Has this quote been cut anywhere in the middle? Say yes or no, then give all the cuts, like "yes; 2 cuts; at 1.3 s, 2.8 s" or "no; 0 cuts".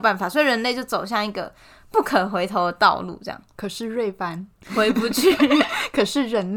no; 0 cuts